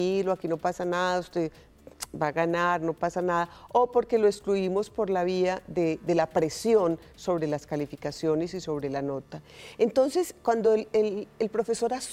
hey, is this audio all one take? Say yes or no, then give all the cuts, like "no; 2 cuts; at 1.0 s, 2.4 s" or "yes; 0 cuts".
yes; 0 cuts